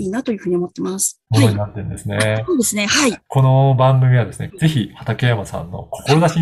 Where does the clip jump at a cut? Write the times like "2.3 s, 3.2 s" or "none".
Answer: 1.3 s, 3.3 s, 4.5 s